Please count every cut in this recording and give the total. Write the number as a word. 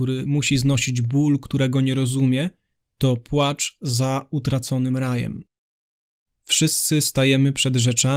one